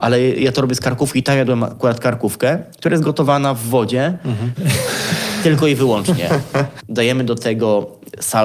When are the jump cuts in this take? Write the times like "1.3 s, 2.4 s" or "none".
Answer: 4.6 s, 6.8 s